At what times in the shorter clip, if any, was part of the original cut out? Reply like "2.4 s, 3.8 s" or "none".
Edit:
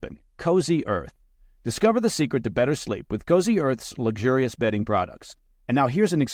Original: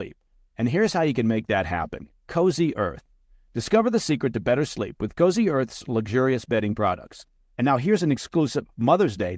none